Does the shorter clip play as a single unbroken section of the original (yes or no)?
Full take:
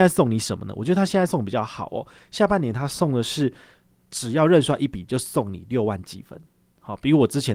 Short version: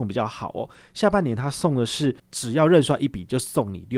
no